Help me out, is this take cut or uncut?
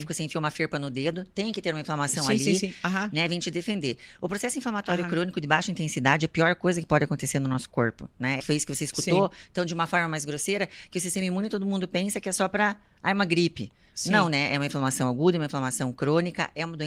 cut